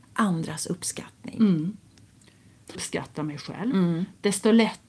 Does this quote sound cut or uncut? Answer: cut